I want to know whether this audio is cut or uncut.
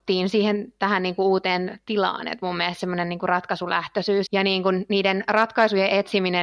cut